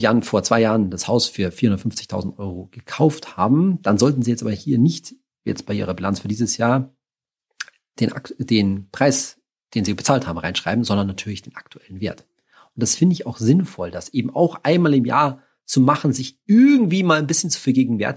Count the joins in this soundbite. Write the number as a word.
zero